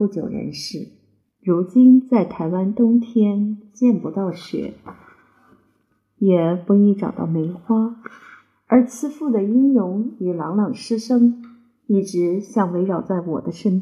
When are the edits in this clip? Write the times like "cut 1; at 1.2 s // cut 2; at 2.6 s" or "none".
cut 1; at 1.2 s